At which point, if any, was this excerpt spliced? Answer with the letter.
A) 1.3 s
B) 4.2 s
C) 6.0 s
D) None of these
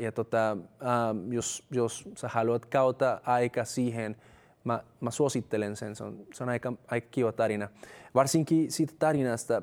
D